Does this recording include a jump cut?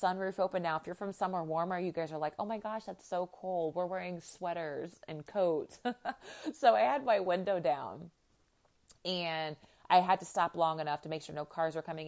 no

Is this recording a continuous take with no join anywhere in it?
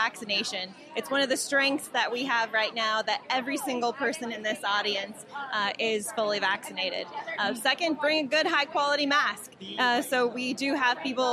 yes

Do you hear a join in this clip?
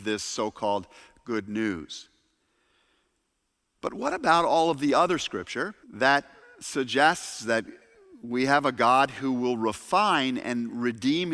yes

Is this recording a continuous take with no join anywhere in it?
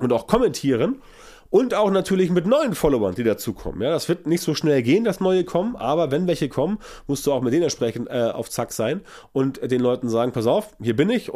yes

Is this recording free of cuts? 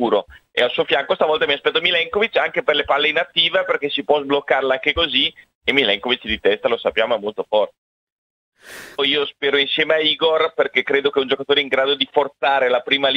no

